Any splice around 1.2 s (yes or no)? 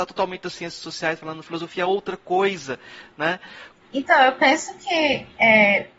no